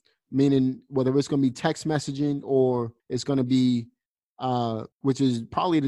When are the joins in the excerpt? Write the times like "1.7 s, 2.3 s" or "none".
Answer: 3.0 s, 4.9 s